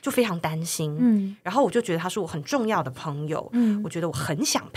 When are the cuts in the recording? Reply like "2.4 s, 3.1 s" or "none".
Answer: none